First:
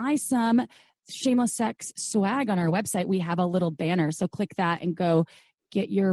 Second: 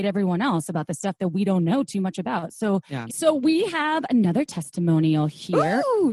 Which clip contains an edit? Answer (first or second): second